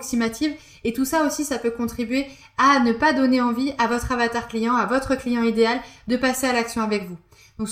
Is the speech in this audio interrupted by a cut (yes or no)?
no